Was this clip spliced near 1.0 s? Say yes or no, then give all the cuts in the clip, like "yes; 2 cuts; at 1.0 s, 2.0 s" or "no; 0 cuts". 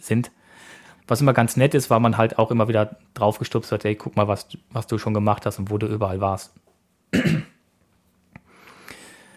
yes; 1 cut; at 1.0 s